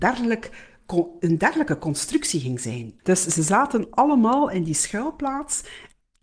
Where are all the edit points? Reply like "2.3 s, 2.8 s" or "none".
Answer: 3.0 s